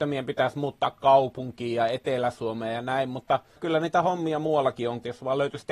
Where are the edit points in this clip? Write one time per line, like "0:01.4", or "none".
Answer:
none